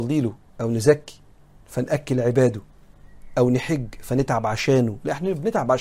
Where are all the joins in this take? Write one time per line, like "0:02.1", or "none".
none